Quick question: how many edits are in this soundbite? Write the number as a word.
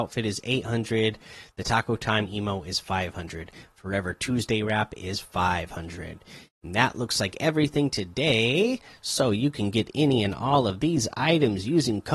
zero